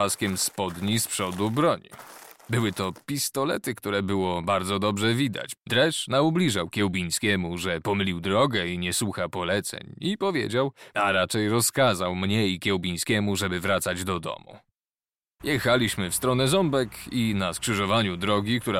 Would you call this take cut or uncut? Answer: cut